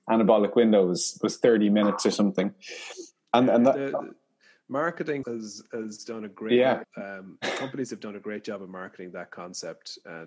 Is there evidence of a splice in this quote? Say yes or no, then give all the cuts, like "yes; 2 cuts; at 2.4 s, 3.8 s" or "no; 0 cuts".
yes; 2 cuts; at 5.2 s, 6.8 s